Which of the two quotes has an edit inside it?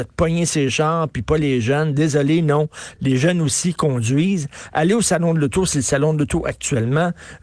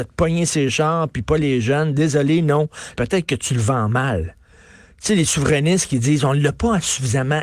second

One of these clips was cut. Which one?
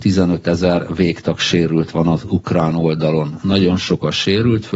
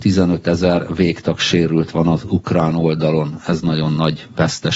first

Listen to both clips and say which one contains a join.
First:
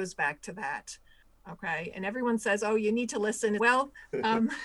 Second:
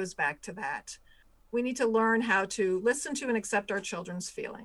first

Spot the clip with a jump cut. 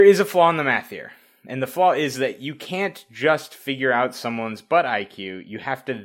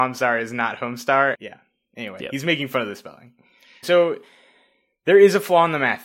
second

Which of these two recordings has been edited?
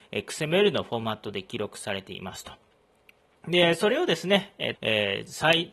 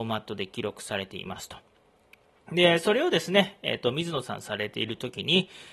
first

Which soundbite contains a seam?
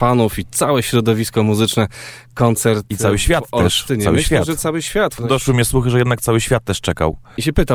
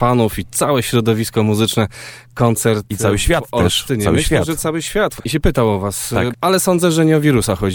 second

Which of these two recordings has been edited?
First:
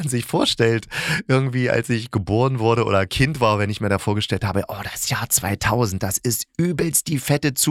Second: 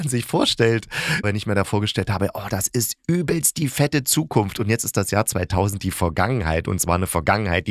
second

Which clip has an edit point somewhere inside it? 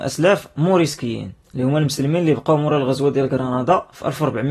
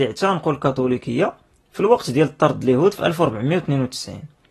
first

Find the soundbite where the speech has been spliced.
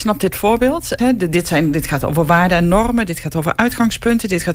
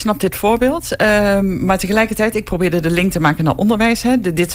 first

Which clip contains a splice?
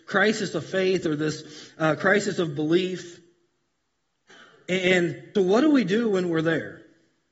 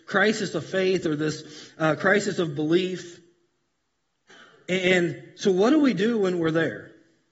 first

